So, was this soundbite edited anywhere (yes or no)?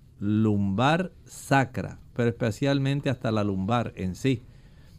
no